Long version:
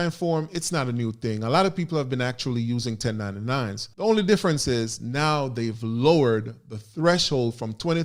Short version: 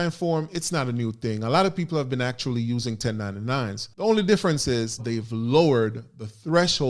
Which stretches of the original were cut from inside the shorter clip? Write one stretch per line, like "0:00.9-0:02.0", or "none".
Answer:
0:05.0-0:05.5